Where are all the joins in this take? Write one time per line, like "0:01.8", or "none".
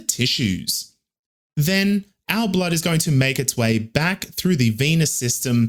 none